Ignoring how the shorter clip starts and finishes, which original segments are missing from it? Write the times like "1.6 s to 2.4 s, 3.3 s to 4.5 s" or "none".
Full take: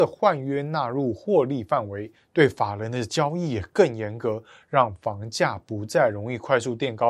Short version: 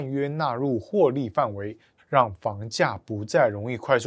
2.3 s to 4.6 s